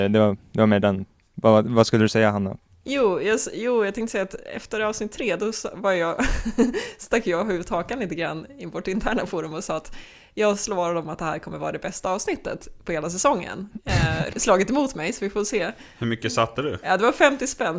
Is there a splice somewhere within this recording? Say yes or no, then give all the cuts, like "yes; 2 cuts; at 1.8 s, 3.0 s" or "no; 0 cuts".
yes; 1 cut; at 14.3 s